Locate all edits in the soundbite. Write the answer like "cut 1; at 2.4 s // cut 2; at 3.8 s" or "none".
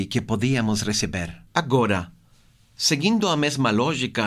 cut 1; at 1.5 s